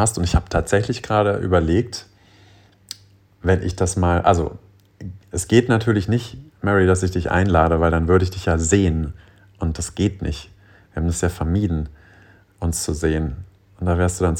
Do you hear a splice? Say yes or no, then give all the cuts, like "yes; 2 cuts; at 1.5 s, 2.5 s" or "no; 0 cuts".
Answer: no; 0 cuts